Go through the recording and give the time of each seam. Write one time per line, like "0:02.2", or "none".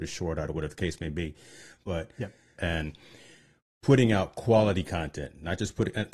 0:02.6